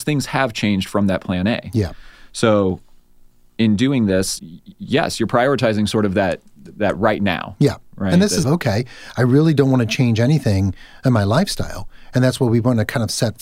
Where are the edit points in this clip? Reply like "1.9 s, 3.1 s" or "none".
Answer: 4.4 s, 8.4 s